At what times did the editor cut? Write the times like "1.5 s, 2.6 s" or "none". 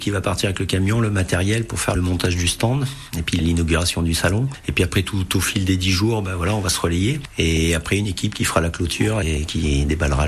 none